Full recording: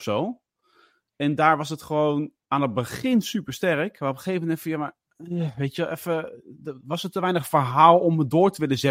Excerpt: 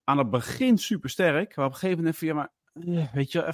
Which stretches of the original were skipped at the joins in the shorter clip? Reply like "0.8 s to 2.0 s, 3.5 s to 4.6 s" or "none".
none